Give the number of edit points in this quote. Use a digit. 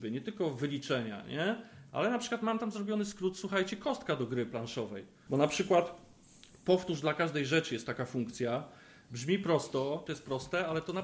2